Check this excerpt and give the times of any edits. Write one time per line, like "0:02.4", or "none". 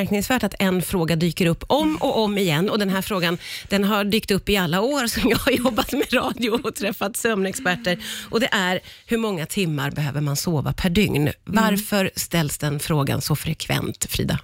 none

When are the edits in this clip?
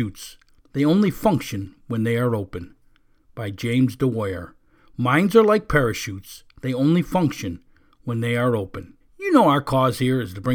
0:09.0

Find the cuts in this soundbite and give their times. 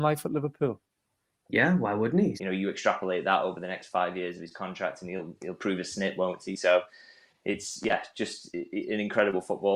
0:02.4

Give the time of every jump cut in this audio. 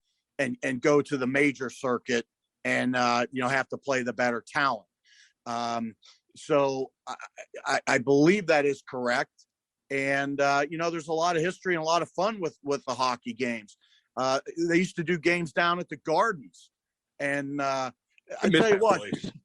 none

